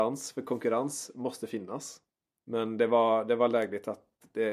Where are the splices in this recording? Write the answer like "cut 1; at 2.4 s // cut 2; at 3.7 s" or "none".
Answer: cut 1; at 2.4 s